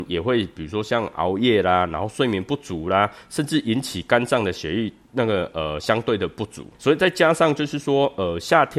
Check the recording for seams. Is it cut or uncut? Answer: cut